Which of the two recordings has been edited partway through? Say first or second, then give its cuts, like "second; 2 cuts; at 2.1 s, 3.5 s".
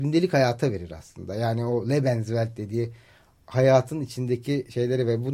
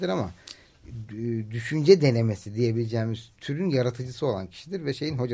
second; 1 cut; at 1.1 s